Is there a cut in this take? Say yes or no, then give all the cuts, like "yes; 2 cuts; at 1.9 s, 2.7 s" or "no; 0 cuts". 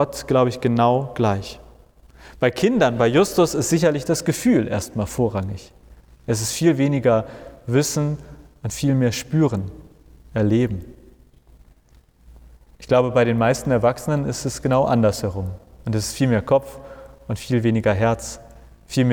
no; 0 cuts